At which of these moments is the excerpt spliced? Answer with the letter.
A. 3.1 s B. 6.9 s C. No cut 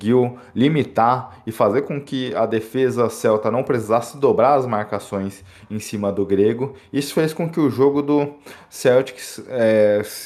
C